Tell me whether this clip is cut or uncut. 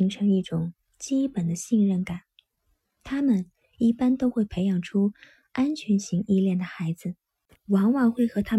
cut